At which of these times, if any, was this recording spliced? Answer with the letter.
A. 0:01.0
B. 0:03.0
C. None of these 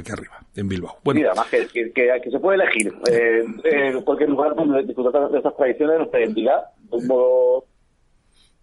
C